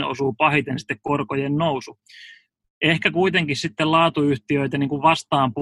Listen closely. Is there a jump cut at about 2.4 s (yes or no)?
no